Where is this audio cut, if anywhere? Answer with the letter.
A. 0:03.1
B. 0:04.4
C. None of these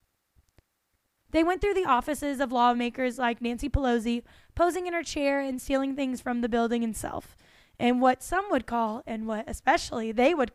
C